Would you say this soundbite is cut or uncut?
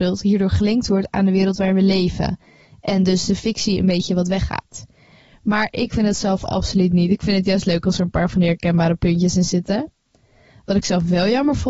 uncut